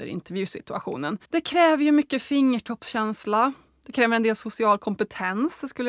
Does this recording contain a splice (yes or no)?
yes